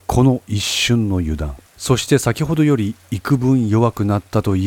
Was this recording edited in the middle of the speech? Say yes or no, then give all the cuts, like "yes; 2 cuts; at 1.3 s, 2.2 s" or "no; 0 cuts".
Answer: yes; 1 cut; at 1.7 s